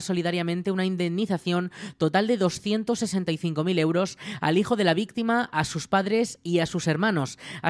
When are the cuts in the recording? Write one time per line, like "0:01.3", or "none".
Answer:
none